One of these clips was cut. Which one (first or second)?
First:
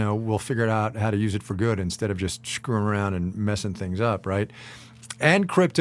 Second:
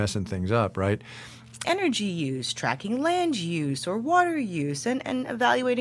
second